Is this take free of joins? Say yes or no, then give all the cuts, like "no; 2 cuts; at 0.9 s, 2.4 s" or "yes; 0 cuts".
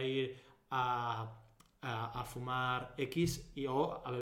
yes; 0 cuts